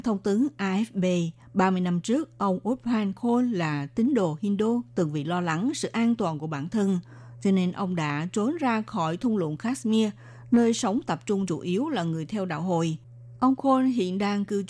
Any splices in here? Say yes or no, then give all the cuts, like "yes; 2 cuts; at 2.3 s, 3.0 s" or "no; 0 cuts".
yes; 1 cut; at 13.4 s